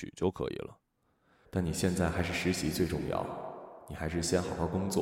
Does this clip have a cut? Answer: yes; 1 cut; at 1.4 s

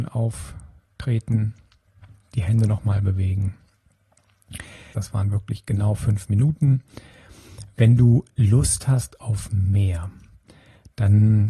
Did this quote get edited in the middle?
yes; 1 cut; at 4.9 s

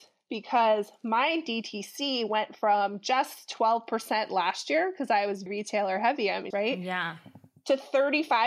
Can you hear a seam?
yes; 2 cuts; at 5.5 s, 6.5 s

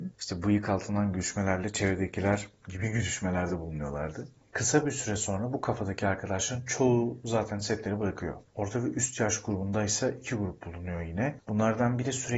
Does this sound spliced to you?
no; 0 cuts

